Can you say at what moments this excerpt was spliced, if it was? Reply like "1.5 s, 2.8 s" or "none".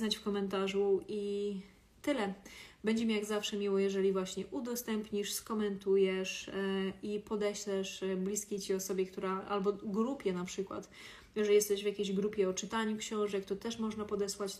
none